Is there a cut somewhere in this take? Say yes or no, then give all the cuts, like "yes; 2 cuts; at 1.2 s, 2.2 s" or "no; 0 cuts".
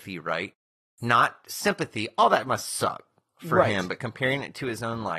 no; 0 cuts